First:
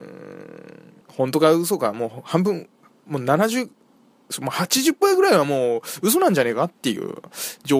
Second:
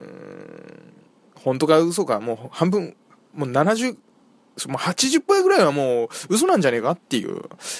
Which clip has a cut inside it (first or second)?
first